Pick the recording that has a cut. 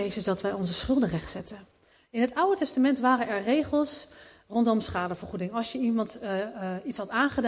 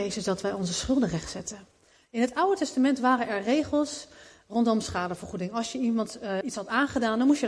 second; 1 cut; at 6.4 s

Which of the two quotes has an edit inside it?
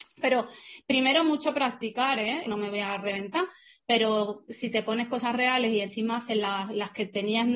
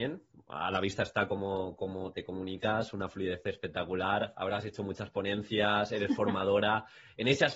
first; 1 cut; at 2.5 s

